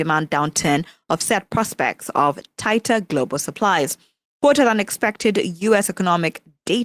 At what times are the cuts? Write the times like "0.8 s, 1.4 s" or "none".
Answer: none